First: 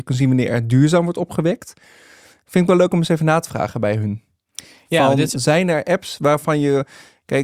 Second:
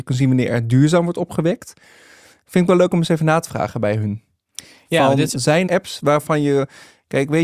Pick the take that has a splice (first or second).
second